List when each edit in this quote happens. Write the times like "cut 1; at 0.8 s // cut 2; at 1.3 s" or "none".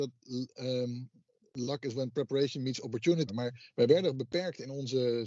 cut 1; at 3.3 s